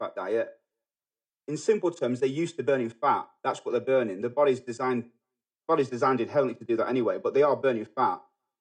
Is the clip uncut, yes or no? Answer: yes